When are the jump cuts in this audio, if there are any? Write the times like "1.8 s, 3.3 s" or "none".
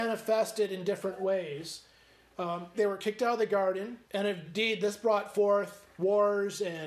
2.7 s, 4.0 s